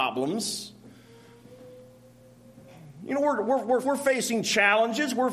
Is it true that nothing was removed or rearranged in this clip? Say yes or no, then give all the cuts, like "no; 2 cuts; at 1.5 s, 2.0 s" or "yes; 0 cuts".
no; 1 cut; at 3.8 s